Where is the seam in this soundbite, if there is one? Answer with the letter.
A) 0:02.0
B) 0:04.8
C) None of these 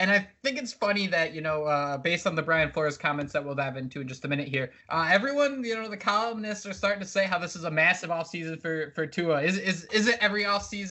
B